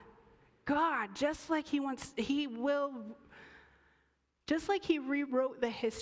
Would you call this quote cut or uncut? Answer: uncut